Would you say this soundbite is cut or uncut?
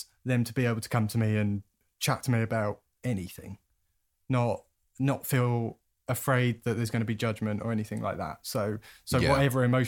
uncut